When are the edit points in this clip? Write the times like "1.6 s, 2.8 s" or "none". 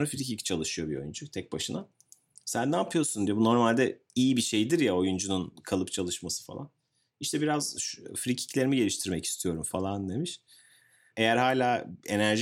11.1 s